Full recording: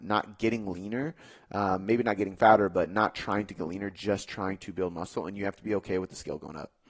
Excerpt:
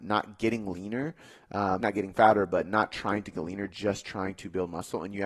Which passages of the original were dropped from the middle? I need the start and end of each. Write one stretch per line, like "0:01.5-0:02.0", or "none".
0:01.8-0:02.0